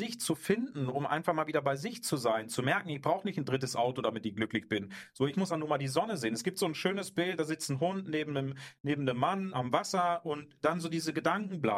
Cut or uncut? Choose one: cut